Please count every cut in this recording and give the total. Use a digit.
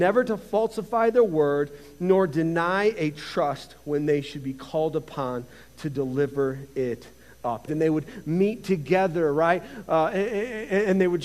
1